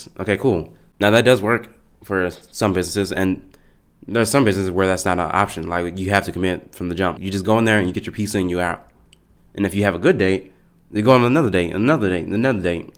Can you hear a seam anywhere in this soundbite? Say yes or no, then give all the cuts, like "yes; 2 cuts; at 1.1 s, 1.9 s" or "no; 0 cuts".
yes; 3 cuts; at 0.9 s, 7.2 s, 9.4 s